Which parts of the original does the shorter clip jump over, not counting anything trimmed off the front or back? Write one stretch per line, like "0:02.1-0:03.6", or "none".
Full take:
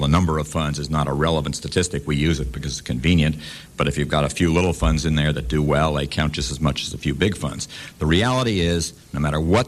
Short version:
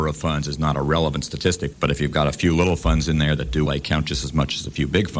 0:02.0-0:03.7
0:05.6-0:05.9